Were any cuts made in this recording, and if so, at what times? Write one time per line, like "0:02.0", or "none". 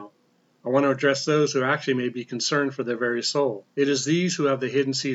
0:03.7